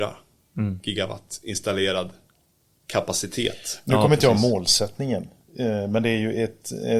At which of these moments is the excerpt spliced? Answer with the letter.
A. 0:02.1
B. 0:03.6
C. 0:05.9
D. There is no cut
D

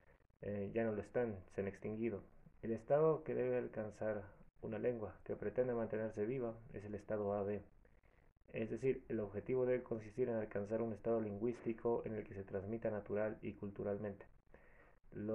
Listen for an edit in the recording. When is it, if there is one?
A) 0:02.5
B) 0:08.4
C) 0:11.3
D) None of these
A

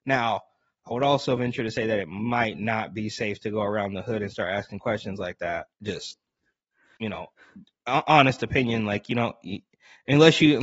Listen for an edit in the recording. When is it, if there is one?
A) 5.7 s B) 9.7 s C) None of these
A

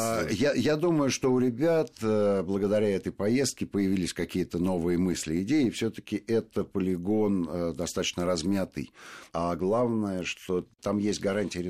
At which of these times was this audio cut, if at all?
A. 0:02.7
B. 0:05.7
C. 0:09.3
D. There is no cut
C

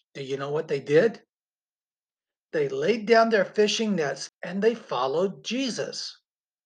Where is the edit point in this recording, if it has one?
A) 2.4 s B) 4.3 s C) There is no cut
B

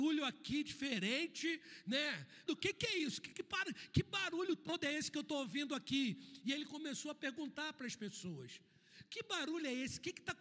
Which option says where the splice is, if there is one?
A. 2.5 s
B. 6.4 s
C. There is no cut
A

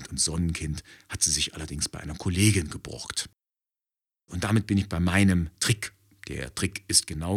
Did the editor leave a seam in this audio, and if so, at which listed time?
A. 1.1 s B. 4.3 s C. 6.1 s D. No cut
B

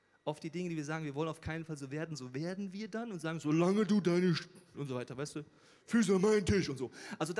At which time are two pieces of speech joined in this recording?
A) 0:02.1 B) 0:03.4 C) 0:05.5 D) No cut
D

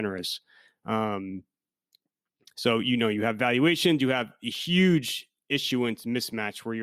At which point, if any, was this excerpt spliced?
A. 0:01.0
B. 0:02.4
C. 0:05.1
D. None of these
D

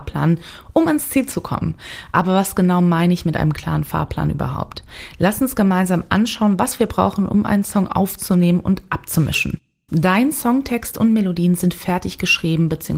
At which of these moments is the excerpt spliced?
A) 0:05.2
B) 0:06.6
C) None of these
C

